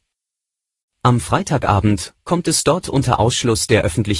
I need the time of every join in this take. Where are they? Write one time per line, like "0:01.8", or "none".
0:02.2